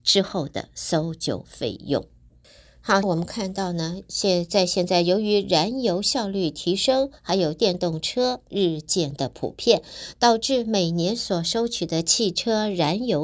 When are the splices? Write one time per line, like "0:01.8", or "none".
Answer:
0:03.0